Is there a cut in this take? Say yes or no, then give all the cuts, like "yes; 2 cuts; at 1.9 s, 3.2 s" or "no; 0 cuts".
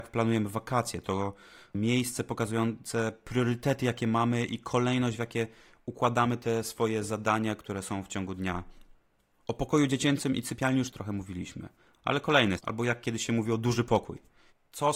yes; 2 cuts; at 10.9 s, 12.6 s